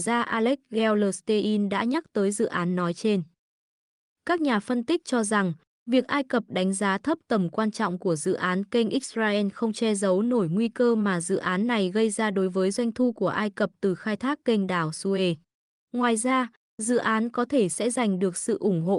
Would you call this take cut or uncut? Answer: uncut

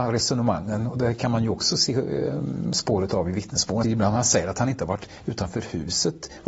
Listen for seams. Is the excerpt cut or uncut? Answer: cut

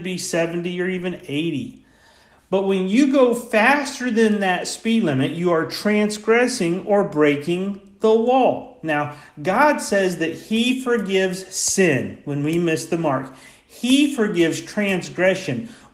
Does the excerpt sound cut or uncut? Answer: uncut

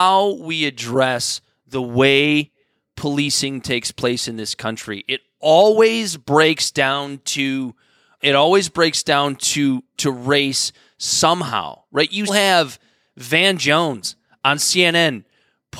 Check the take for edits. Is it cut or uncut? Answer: cut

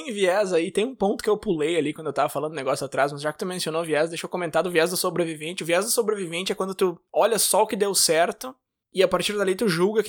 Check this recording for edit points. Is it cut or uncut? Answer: uncut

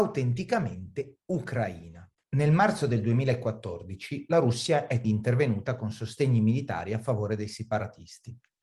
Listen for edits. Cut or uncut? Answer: cut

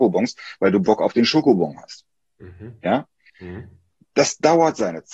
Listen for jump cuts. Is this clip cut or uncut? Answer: cut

